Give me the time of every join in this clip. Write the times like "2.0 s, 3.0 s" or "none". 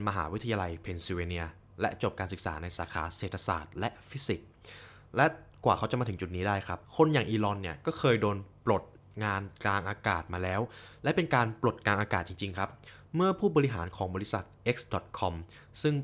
6.8 s